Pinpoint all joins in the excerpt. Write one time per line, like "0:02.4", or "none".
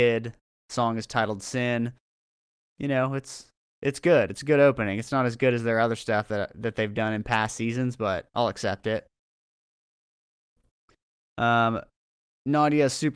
none

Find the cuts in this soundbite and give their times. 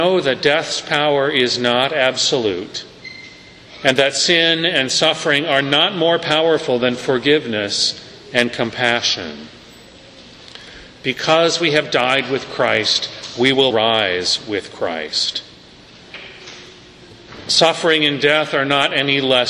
0:13.7

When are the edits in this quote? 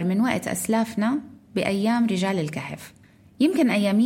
none

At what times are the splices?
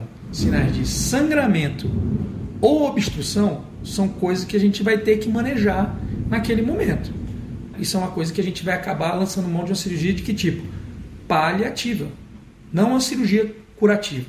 0:07.7

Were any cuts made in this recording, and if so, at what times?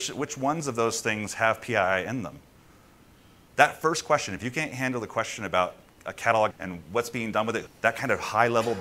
0:06.5
0:07.7

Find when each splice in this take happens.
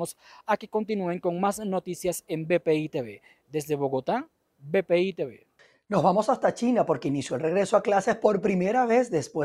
0:04.5

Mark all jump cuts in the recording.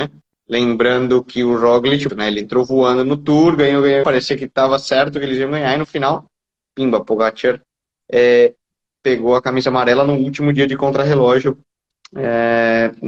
0:02.1
0:04.0

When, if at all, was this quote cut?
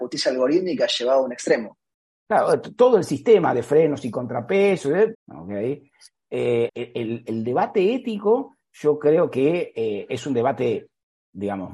0:05.1
0:06.7

